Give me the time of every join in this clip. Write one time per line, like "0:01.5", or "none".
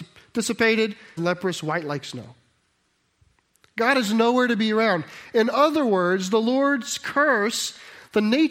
0:01.2